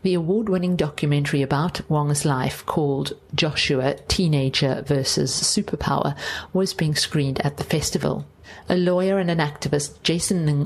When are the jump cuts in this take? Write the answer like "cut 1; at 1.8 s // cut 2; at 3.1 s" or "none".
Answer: none